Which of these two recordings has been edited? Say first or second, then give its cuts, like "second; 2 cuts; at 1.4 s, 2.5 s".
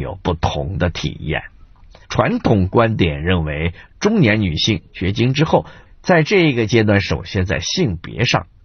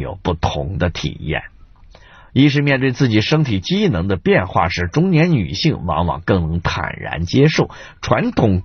first; 2 cuts; at 2.0 s, 5.9 s